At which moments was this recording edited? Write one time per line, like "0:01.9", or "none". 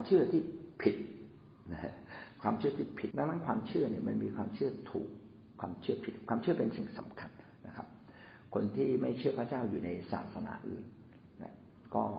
0:03.1

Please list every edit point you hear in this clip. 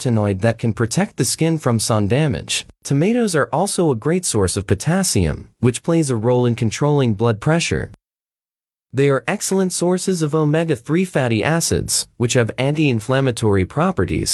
0:08.9

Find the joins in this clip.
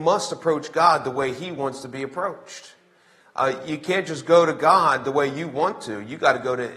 none

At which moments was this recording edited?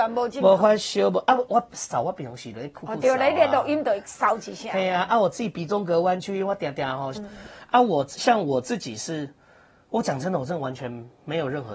0:07.1

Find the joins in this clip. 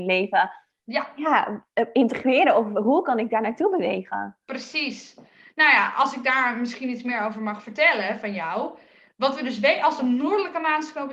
none

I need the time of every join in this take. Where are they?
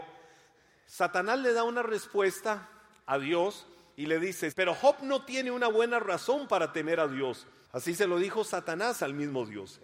0:04.5
0:07.6

